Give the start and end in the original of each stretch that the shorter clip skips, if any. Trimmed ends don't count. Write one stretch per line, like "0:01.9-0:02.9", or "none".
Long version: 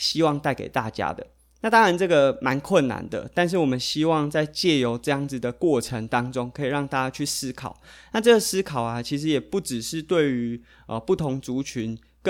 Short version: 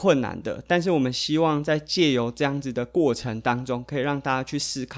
none